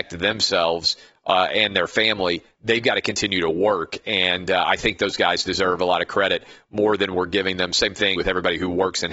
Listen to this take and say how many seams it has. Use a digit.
1